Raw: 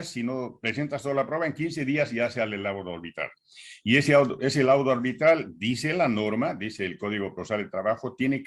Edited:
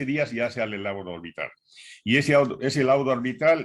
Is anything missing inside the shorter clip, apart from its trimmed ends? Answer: no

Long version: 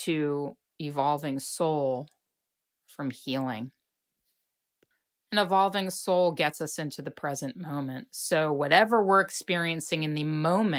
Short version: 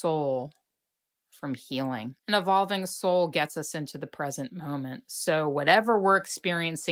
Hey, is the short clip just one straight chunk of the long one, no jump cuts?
no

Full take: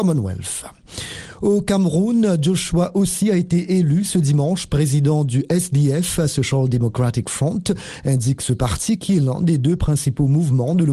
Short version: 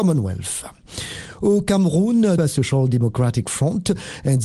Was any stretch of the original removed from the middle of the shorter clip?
yes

